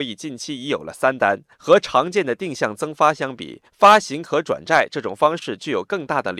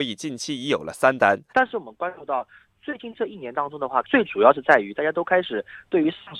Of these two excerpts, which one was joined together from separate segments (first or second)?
second